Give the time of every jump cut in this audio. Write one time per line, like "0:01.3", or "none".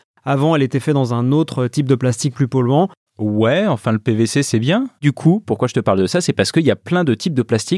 0:03.1
0:05.0